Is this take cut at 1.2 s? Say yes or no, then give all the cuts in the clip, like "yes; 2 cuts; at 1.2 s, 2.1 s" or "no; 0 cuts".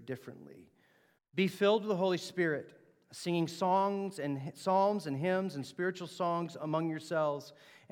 yes; 1 cut; at 1.2 s